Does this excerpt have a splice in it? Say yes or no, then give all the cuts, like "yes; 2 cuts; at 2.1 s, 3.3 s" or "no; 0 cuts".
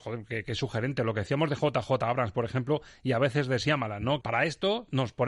yes; 1 cut; at 4.2 s